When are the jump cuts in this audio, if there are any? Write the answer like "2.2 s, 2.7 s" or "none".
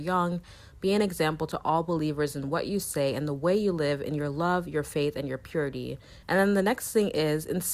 6.2 s